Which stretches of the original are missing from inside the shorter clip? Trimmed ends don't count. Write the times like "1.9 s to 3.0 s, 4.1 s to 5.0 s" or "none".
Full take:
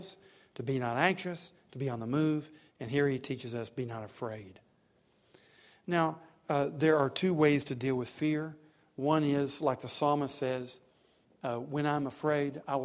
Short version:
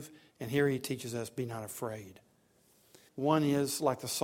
5.5 s to 8.9 s